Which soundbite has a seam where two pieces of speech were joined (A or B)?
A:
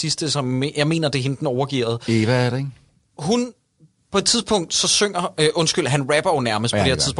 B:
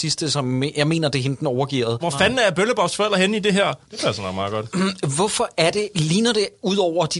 B